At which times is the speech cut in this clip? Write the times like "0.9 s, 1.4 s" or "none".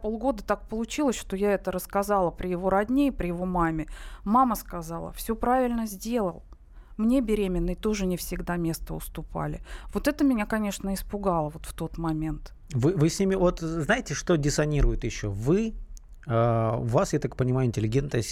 none